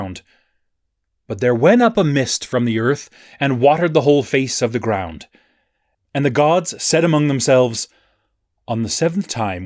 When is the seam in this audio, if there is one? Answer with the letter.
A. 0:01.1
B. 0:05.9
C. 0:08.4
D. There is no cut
B